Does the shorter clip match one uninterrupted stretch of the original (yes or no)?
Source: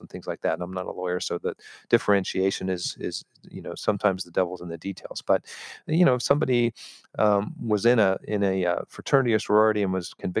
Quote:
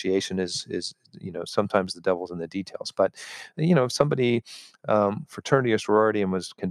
no